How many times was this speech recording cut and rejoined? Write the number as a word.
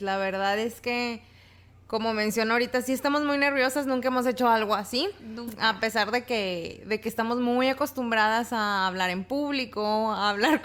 zero